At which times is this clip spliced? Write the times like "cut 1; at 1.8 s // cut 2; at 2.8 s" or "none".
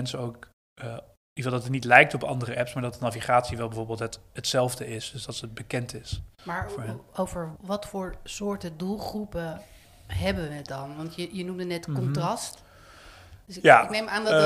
cut 1; at 7.6 s

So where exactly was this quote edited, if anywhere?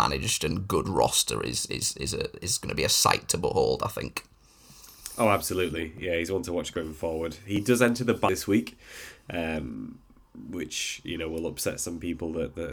none

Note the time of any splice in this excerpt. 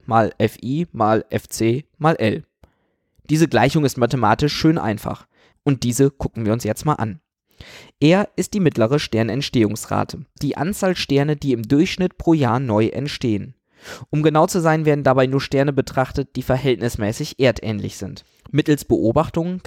cut 1; at 5.5 s // cut 2; at 10.4 s

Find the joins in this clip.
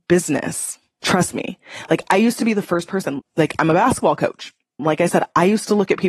cut 1; at 3.2 s // cut 2; at 4.8 s

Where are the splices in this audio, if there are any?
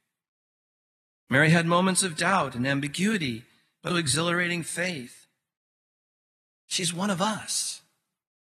cut 1; at 3.9 s

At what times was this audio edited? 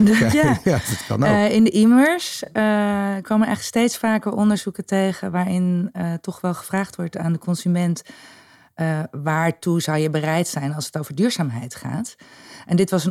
none

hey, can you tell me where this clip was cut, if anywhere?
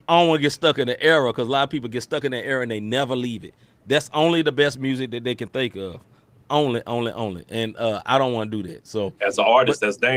none

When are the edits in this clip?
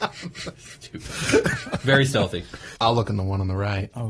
cut 1; at 2.8 s

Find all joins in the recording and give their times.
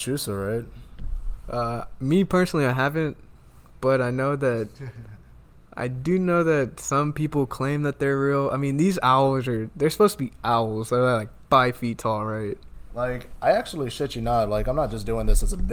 none

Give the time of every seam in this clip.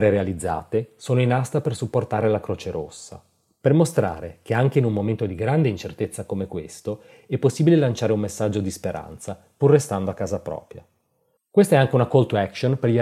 cut 1; at 11.4 s

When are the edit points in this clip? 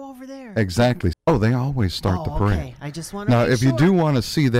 cut 1; at 1.1 s

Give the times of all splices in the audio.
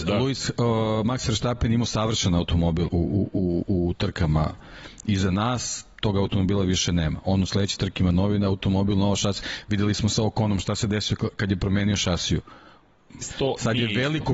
cut 1; at 2.9 s // cut 2; at 13.2 s

